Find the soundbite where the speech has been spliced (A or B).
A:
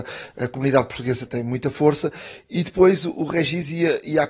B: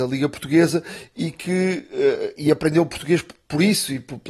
A